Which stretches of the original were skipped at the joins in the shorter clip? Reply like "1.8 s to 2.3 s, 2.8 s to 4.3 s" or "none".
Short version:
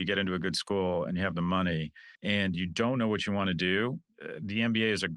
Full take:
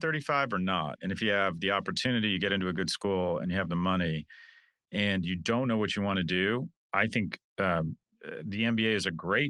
4.5 s to 4.8 s, 6.8 s to 8.1 s